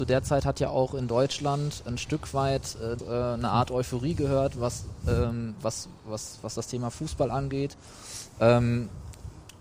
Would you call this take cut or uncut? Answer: cut